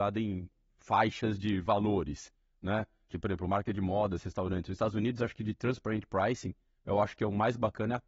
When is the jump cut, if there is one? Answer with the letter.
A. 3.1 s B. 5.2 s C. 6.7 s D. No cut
A